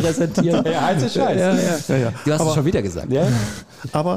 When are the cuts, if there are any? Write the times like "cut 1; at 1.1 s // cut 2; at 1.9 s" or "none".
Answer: none